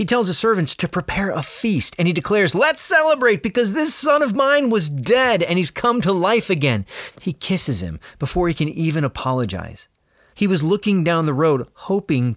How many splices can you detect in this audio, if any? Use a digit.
2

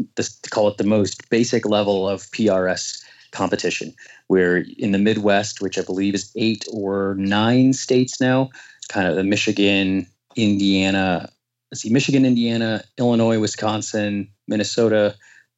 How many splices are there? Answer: 1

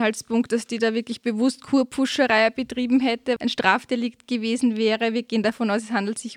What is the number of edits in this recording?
1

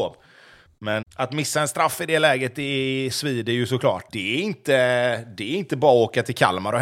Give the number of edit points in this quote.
2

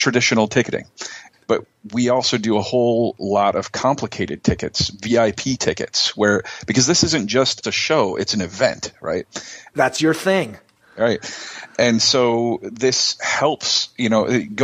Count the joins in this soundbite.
2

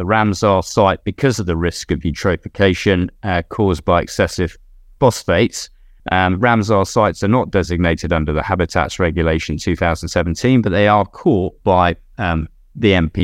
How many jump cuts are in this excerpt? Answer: 1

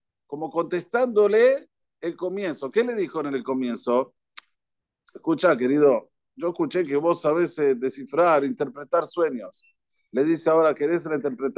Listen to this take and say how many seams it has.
0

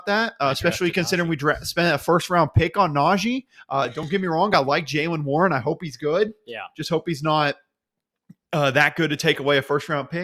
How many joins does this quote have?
0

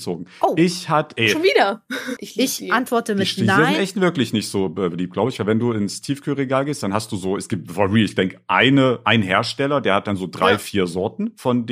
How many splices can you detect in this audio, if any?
1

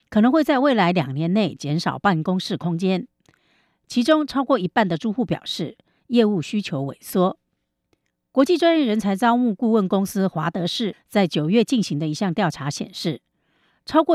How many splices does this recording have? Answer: 0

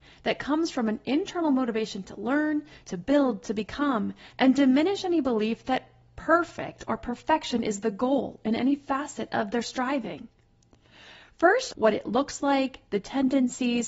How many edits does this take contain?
3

